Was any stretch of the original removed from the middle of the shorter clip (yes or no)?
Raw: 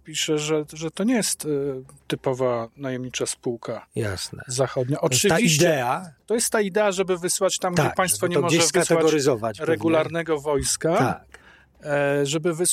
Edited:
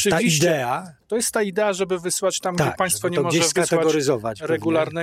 no